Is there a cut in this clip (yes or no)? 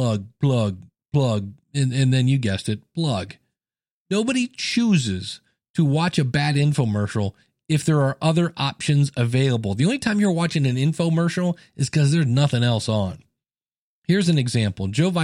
no